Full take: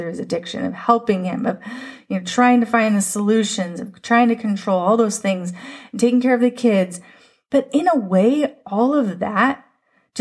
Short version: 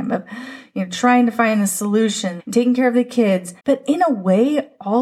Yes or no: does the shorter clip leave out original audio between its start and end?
yes